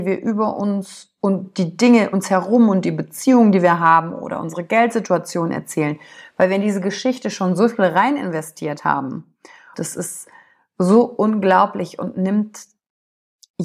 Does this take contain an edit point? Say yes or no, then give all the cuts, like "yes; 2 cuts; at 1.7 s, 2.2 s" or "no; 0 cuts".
yes; 2 cuts; at 2.1 s, 9.7 s